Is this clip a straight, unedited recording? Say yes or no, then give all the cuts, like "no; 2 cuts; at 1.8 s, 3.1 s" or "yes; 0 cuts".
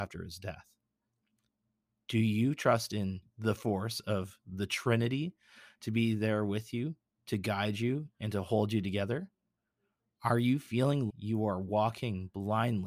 no; 1 cut; at 11.1 s